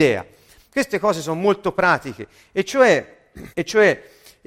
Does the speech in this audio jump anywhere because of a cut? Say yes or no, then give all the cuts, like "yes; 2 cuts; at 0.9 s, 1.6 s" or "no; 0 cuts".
yes; 1 cut; at 3.5 s